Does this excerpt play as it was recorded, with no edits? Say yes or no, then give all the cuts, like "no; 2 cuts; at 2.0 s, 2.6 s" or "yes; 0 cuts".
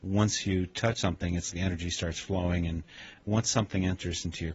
no; 1 cut; at 1.5 s